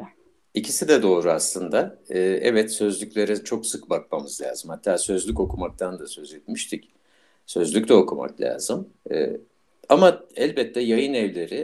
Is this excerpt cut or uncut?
uncut